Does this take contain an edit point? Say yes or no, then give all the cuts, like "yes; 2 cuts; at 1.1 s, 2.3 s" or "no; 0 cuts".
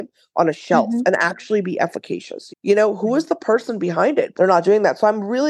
yes; 2 cuts; at 2.5 s, 4.3 s